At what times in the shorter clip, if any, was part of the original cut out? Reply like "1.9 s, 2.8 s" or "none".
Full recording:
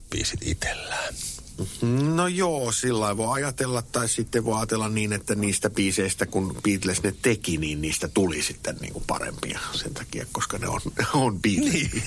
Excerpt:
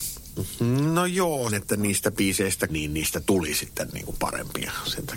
1.5 s, 2.7 s